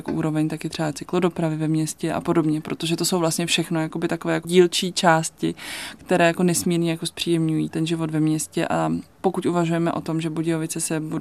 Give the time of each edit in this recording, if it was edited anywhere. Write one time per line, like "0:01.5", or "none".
0:07.7
0:09.1